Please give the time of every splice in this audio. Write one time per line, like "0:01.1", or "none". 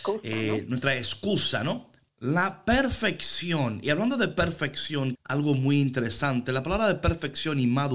0:02.1
0:05.1